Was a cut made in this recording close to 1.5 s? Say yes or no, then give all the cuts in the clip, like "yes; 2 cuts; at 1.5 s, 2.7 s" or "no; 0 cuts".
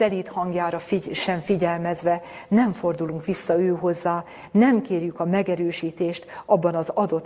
no; 0 cuts